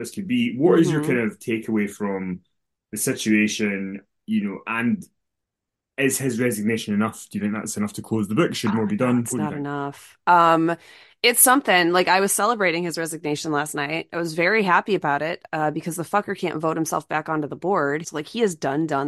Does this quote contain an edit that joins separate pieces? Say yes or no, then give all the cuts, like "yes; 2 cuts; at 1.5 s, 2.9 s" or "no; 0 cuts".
yes; 1 cut; at 18.0 s